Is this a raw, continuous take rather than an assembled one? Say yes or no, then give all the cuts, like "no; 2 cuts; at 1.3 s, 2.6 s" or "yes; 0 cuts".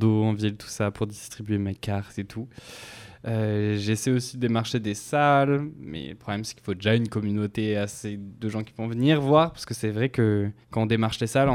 no; 1 cut; at 10.6 s